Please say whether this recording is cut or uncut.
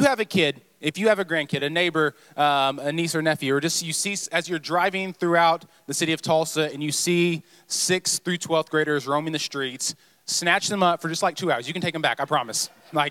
uncut